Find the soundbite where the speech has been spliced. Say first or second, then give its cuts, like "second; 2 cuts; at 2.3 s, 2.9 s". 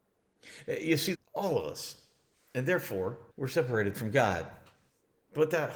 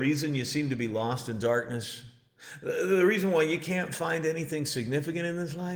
first; 2 cuts; at 1.1 s, 3.3 s